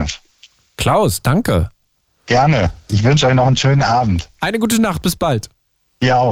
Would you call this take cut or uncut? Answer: uncut